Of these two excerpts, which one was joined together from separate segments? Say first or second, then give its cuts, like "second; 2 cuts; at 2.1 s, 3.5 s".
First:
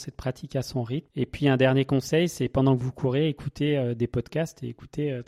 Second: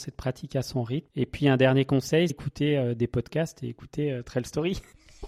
second; 1 cut; at 2.3 s